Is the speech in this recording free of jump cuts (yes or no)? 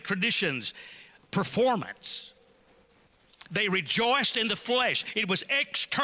no